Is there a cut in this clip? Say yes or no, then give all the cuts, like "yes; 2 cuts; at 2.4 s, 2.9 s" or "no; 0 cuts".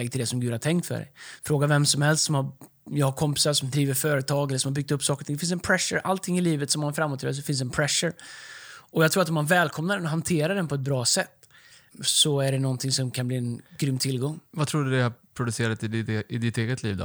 yes; 1 cut; at 11.9 s